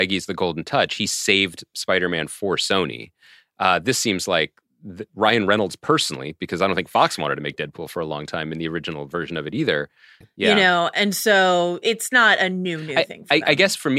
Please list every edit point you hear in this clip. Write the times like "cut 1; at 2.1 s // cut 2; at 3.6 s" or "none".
cut 1; at 10.2 s